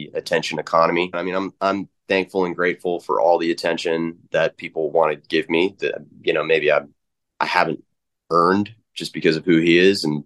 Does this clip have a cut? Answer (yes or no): yes